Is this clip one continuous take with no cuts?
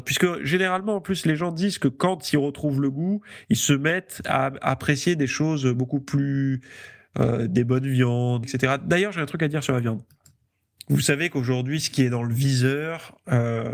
no; 1 cut; at 8.4 s

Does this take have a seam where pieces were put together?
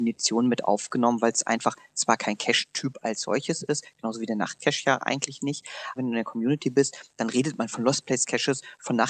yes; 1 cut; at 6.0 s

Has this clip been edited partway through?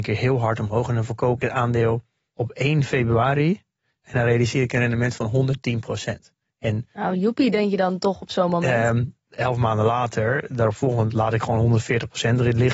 no; 0 cuts

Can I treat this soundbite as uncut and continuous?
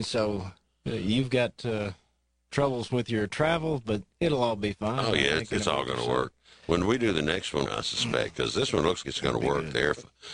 no; 2 cuts; at 7.7 s, 9.0 s

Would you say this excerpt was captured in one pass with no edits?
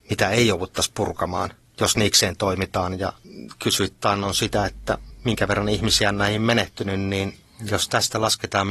yes; 0 cuts

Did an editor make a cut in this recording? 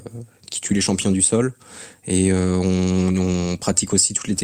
no; 0 cuts

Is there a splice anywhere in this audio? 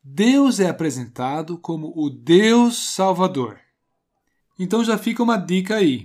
yes; 1 cut; at 4.4 s

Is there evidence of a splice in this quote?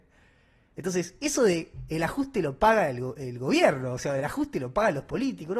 no; 0 cuts

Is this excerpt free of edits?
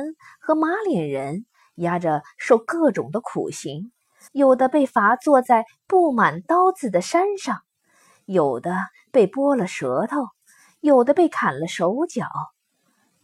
no; 1 cut; at 4.3 s

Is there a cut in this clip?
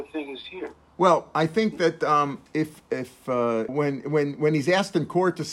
yes; 2 cuts; at 2.5 s, 3.7 s

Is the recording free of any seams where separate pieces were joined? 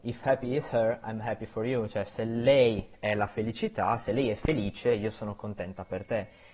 yes; 0 cuts

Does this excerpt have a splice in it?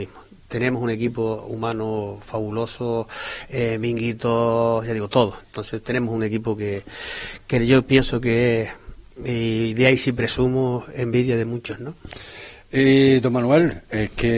yes; 1 cut; at 5.4 s

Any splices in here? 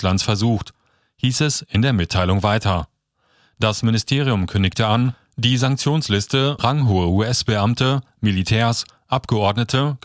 yes; 1 cut; at 6.6 s

